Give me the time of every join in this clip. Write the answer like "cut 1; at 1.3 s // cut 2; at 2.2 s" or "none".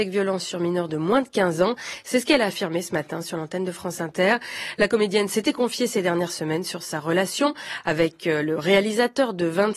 none